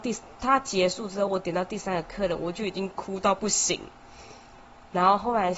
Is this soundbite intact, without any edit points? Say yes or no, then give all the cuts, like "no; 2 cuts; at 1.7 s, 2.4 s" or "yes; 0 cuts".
yes; 0 cuts